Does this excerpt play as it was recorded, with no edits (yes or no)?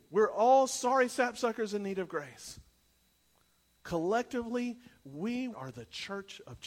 no